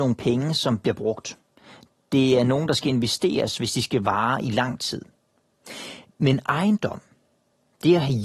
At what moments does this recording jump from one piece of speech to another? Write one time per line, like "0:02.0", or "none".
none